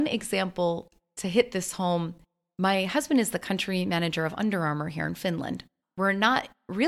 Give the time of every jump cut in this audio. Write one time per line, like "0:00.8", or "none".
0:05.8

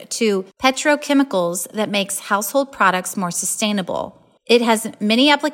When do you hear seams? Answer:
0:04.4

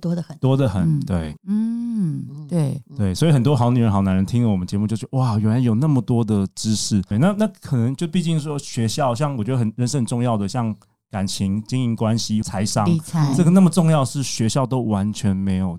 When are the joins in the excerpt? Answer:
0:01.4
0:07.1
0:12.4

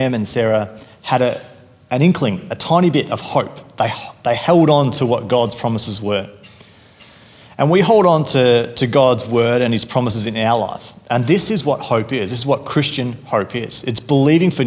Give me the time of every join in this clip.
none

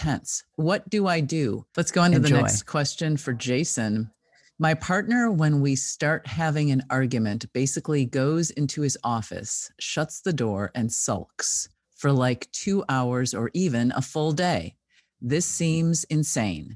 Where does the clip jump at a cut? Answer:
0:01.7

